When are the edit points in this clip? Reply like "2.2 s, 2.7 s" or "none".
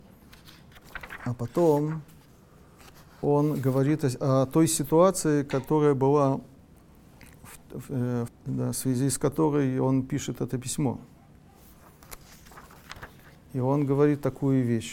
8.3 s